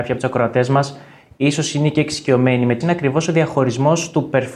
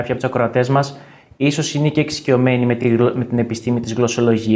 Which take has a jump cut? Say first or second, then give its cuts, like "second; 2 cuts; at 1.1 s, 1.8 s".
first; 1 cut; at 2.8 s